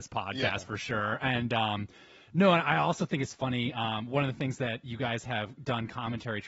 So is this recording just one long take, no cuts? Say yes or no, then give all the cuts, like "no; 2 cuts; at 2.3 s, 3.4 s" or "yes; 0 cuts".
yes; 0 cuts